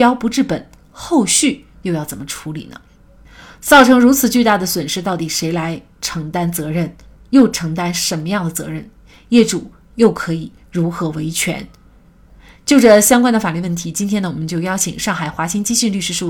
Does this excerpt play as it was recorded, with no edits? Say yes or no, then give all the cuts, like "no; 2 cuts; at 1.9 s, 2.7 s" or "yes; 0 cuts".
yes; 0 cuts